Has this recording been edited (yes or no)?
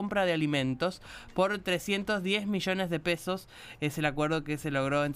no